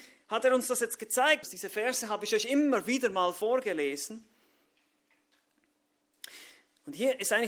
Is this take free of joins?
no; 1 cut; at 1.4 s

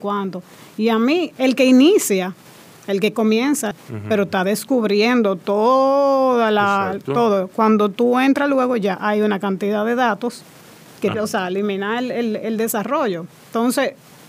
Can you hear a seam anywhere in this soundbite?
yes; 2 cuts; at 3.7 s, 11.1 s

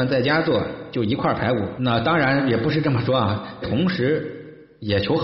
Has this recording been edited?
yes; 2 cuts; at 1.8 s, 3.6 s

